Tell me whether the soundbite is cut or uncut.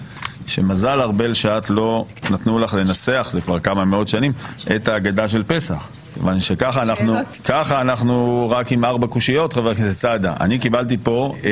uncut